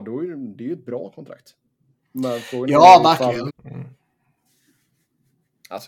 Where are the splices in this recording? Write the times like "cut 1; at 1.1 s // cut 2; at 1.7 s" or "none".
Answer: cut 1; at 3.5 s